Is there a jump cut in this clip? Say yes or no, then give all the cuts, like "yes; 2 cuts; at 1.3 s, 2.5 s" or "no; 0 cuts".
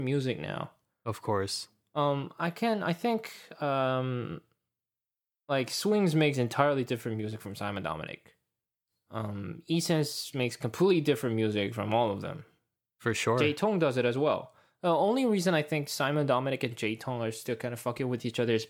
no; 0 cuts